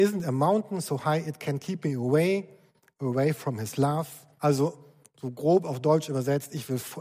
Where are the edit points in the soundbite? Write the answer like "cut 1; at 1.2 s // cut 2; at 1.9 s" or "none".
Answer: cut 1; at 4.4 s